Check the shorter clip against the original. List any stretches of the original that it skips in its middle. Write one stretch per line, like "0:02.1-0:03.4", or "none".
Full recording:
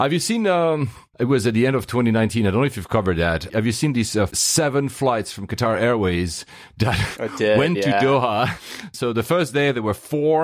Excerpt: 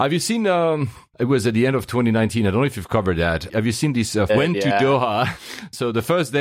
0:04.3-0:07.5